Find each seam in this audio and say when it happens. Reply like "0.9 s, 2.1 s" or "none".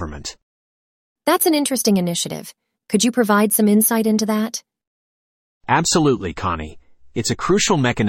2.8 s